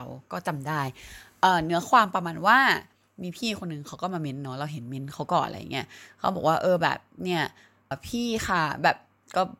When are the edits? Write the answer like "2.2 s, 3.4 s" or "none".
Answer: 7.9 s

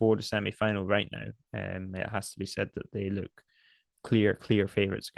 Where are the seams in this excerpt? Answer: none

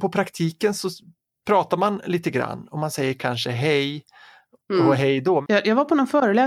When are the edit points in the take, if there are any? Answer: none

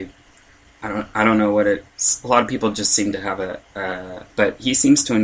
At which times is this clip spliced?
4.3 s

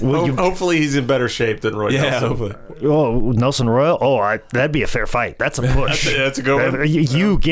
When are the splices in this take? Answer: none

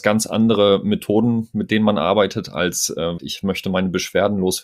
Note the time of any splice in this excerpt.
3.2 s

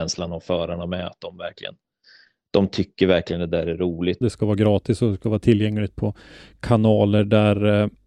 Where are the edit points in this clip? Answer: 4.2 s

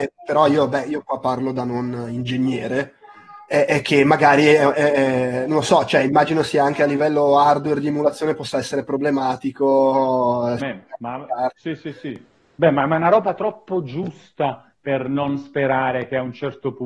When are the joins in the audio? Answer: 10.6 s

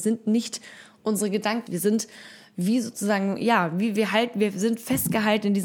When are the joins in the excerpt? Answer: 1.7 s

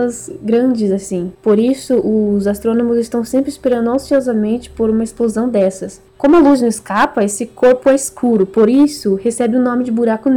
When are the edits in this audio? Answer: 6.1 s

